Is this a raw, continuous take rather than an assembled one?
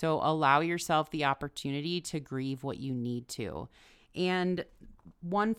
yes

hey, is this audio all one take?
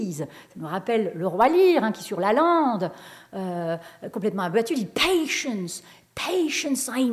yes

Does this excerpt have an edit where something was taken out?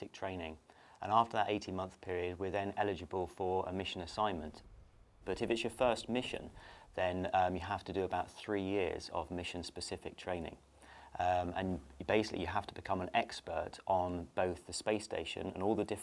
no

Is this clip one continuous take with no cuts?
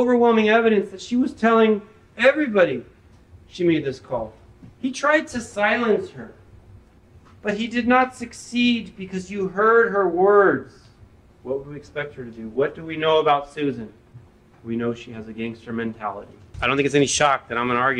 no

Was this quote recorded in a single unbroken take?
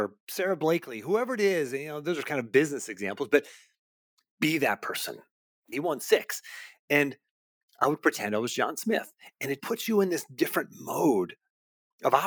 no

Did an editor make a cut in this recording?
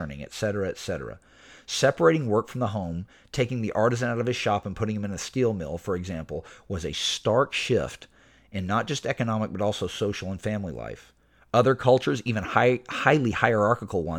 no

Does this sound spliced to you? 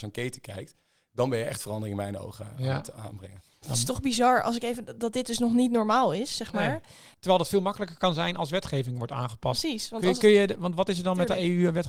yes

